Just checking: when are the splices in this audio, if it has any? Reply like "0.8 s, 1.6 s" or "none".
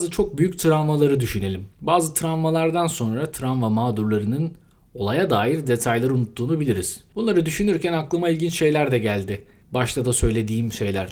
7.1 s